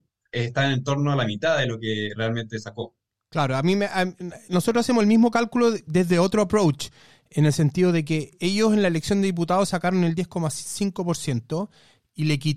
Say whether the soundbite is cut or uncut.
uncut